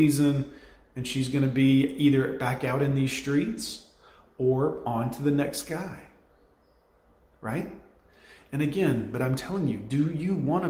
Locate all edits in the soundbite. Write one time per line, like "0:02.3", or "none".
0:09.1